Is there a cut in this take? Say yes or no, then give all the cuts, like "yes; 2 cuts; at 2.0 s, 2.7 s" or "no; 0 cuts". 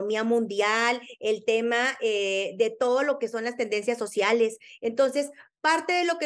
no; 0 cuts